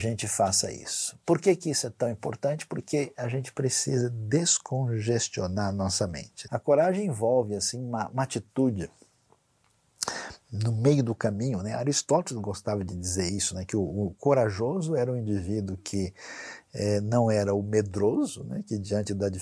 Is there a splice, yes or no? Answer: yes